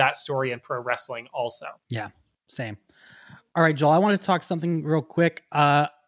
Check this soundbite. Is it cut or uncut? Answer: uncut